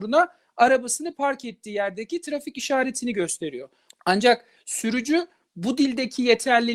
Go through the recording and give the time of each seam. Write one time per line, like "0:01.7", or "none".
0:03.9